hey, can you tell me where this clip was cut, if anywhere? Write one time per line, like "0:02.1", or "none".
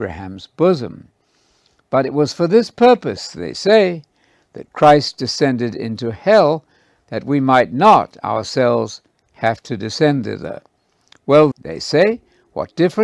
0:11.5